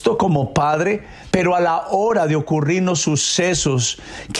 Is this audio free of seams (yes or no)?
no